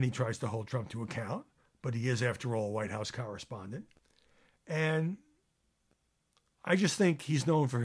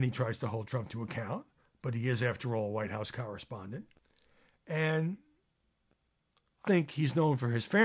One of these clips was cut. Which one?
second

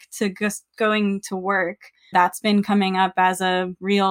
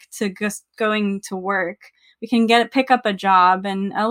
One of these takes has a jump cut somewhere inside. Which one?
first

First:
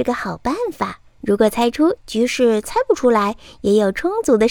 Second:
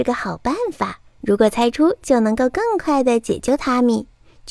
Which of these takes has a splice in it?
first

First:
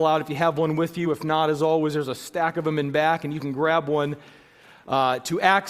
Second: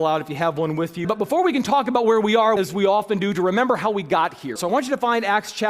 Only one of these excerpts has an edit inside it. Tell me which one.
second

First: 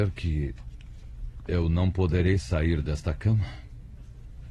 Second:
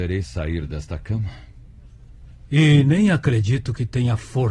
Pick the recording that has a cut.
second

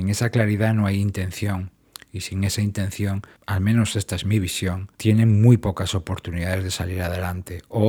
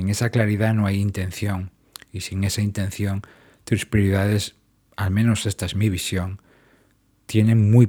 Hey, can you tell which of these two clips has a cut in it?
first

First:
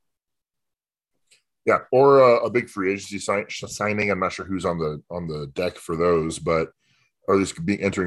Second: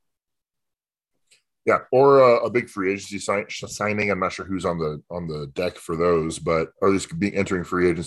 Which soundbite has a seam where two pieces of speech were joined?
second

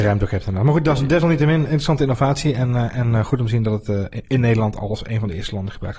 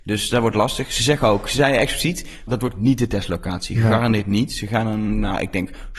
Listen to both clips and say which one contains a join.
second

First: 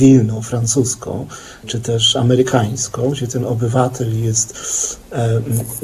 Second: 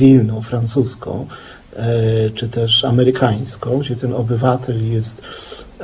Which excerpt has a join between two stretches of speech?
first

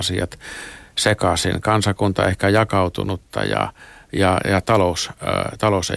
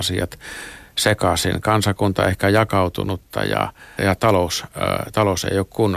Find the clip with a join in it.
second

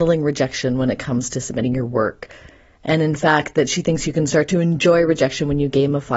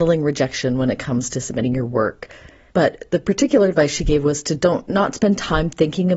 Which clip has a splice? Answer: second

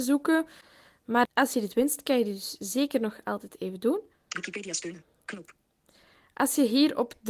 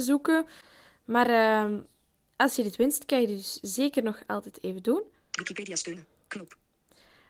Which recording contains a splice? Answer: first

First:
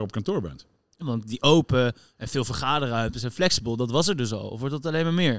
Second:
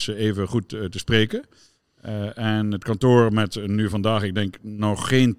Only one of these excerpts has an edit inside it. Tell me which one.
first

